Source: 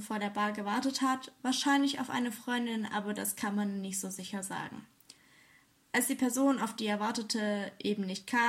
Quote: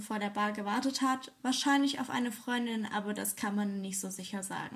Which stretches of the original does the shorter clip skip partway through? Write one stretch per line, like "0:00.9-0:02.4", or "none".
none